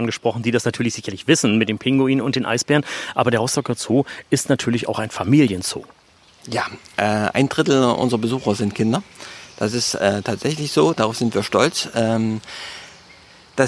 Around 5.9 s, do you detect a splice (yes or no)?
no